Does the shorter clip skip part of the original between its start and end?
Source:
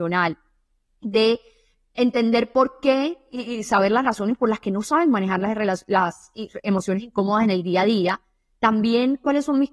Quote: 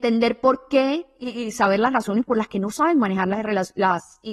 no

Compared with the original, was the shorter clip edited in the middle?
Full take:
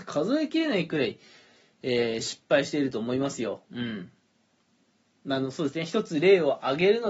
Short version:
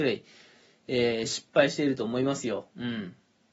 no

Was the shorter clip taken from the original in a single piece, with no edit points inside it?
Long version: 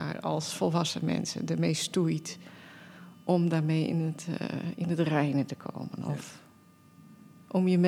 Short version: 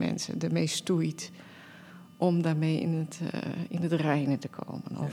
yes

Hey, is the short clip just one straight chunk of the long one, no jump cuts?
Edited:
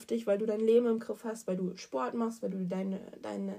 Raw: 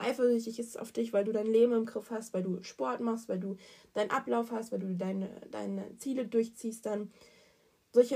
no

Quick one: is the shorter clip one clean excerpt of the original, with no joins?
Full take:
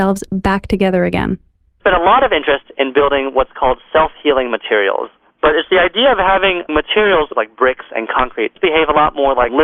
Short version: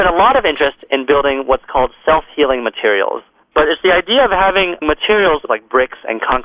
yes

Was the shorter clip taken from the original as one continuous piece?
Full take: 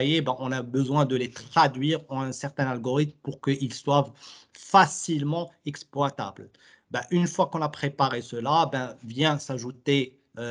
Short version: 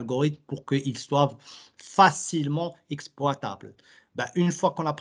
yes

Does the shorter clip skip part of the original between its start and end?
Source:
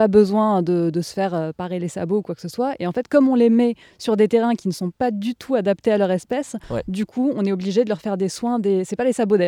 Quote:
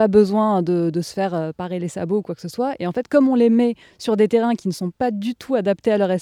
no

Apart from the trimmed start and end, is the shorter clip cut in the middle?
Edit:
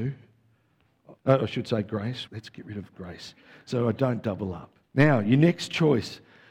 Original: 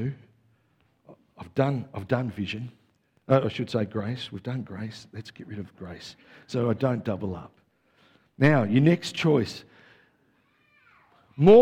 yes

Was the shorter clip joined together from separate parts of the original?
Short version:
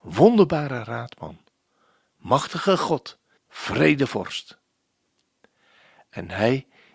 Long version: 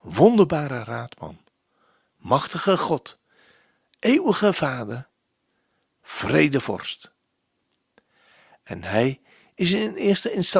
yes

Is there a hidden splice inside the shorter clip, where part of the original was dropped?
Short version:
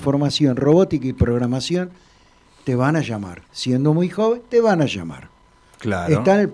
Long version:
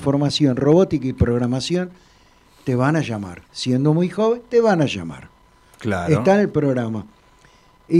no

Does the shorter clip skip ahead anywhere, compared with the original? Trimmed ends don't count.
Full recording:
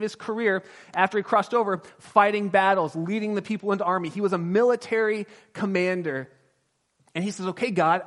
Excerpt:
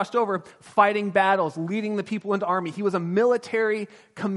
no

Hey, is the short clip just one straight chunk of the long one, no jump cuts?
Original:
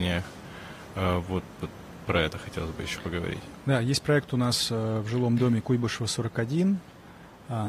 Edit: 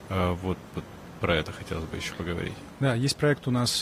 yes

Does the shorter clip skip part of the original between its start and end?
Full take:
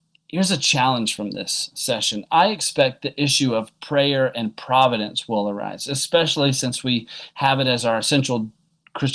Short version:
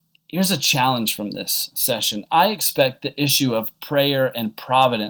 no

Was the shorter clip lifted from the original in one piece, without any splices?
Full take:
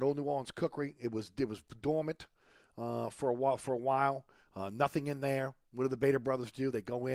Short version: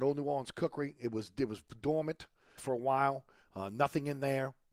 no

